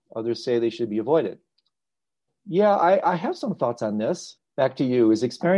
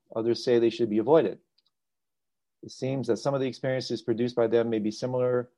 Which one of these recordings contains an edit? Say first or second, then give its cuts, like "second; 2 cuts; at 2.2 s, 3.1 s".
first; 2 cuts; at 2.3 s, 4.4 s